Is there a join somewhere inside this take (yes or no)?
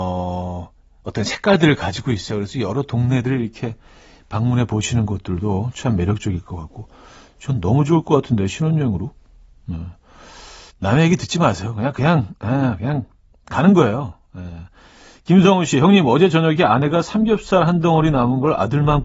yes